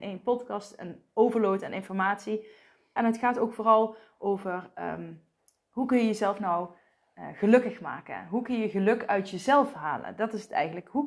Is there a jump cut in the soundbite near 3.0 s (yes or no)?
yes